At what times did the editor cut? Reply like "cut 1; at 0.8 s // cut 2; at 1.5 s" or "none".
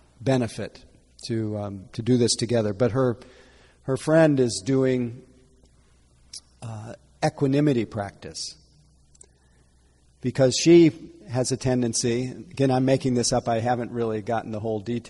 none